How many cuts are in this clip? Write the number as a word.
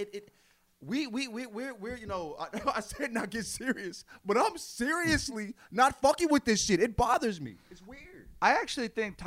zero